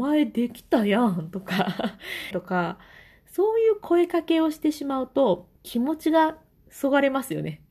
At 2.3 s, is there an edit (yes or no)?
yes